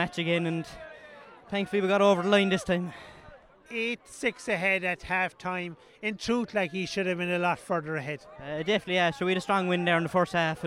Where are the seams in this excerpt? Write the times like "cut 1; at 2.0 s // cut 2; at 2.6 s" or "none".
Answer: none